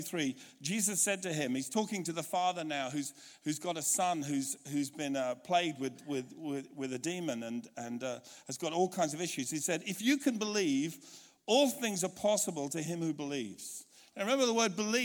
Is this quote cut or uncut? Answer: uncut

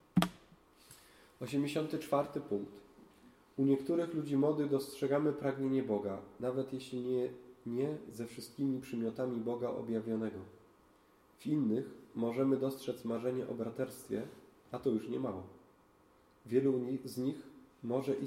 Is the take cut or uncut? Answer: uncut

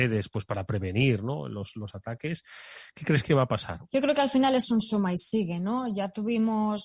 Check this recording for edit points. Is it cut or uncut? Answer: cut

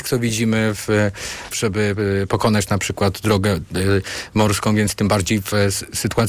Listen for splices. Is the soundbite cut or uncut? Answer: cut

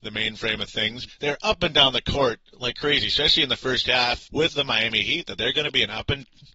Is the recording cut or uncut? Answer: cut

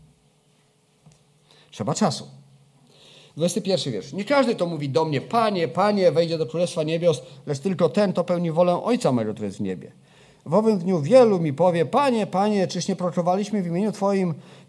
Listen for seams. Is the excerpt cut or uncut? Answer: uncut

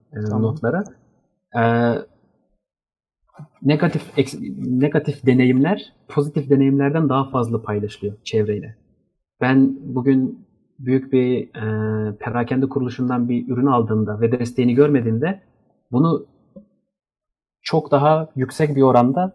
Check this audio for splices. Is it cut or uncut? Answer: uncut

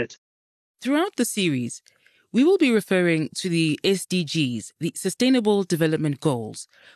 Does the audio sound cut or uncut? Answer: uncut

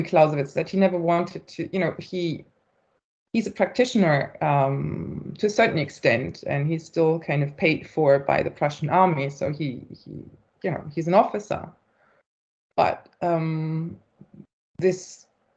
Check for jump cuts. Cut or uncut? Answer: uncut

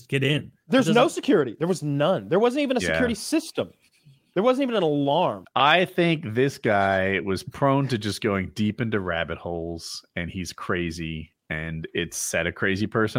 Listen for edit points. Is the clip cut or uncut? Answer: cut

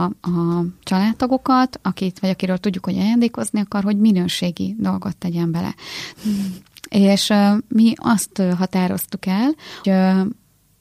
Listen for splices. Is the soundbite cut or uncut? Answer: cut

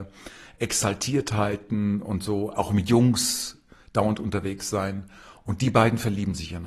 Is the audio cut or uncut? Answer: uncut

